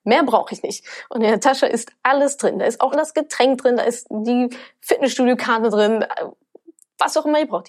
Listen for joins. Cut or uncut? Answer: cut